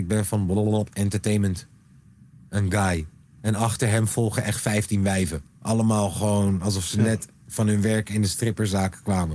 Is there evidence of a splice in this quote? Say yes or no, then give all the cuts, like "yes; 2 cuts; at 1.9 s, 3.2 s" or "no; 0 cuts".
no; 0 cuts